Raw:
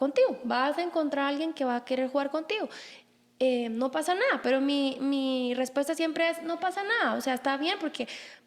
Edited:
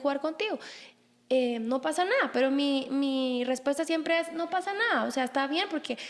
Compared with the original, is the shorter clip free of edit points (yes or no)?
yes